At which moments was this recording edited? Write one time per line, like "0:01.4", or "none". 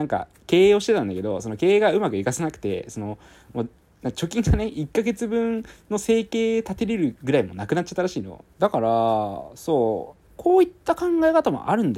0:08.5
0:10.3